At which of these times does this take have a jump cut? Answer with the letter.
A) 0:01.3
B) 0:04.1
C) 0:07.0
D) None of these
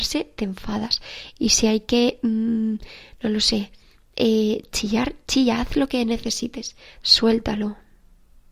C